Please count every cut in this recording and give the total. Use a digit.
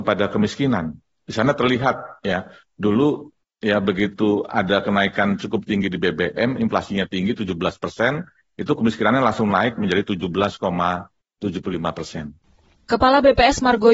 0